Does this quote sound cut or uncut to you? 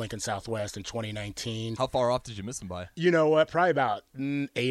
cut